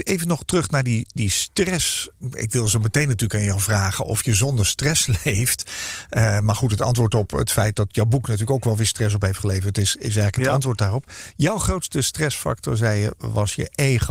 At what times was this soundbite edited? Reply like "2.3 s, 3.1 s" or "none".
none